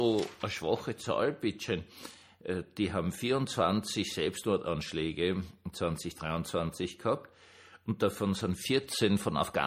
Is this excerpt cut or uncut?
uncut